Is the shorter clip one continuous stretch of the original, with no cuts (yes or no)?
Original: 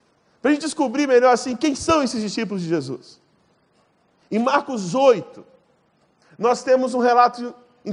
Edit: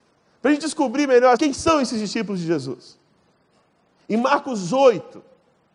no